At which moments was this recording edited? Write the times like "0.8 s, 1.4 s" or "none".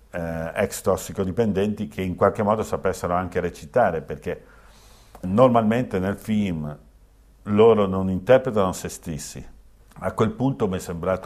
5.2 s, 9.8 s